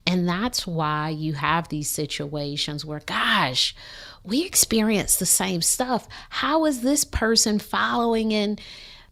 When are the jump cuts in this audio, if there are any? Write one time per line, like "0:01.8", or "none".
none